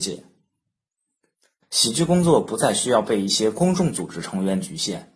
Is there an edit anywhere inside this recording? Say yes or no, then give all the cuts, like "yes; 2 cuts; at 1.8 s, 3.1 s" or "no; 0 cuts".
yes; 1 cut; at 1.6 s